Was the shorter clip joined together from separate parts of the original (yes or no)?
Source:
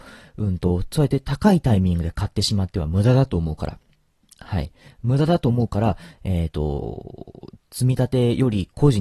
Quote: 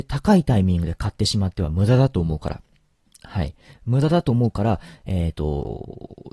no